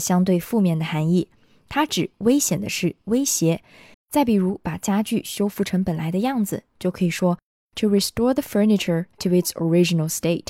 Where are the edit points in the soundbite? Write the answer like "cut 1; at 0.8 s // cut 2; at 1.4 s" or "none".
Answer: cut 1; at 3.9 s